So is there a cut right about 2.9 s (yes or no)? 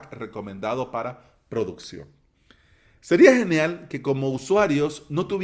no